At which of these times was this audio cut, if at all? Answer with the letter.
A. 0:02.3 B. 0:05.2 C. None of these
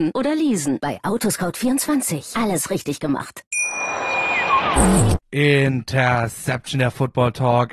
B